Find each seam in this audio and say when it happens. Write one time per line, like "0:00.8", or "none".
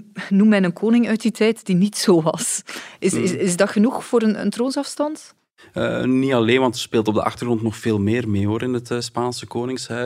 none